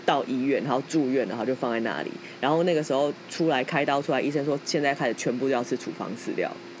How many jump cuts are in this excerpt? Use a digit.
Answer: 0